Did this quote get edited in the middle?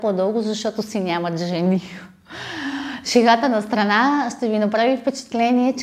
no; 0 cuts

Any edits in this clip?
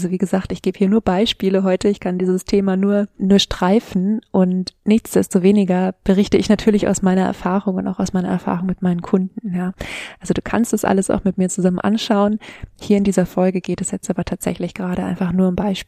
no; 0 cuts

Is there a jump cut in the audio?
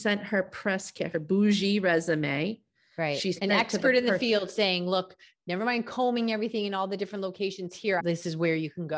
yes; 2 cuts; at 1.1 s, 8.0 s

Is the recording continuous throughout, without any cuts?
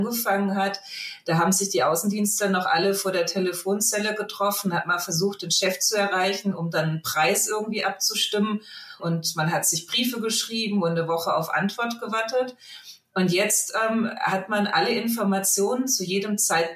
no; 1 cut; at 9.0 s

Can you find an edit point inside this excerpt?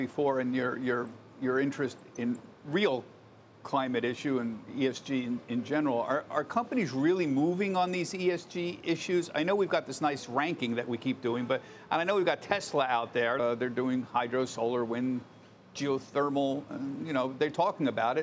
yes; 1 cut; at 13.4 s

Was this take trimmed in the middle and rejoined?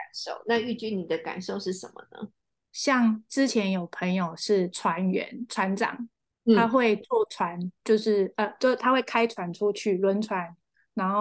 yes; 1 cut; at 2.7 s

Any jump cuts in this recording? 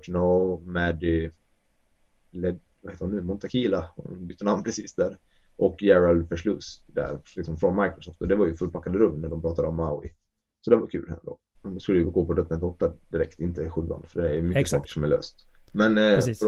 yes; 1 cut; at 11.6 s

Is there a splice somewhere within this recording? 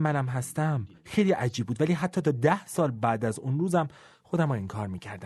yes; 1 cut; at 1.0 s

